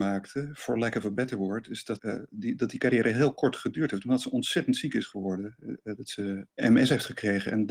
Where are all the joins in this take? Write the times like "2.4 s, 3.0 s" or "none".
2.0 s